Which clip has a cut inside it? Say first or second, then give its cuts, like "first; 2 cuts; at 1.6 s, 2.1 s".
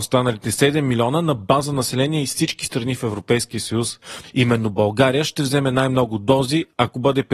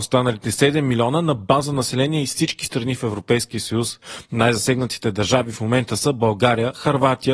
first; 1 cut; at 4.2 s